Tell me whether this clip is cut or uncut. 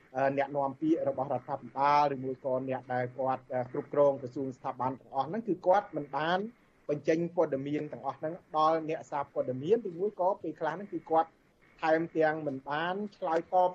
uncut